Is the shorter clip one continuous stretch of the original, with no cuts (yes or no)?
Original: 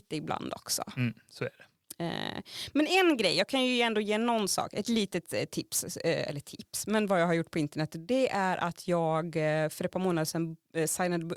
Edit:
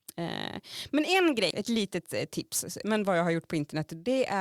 no